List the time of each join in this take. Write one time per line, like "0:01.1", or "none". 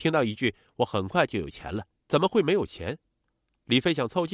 0:02.0